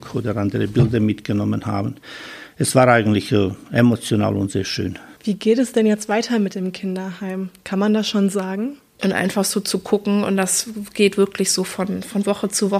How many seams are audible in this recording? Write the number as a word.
one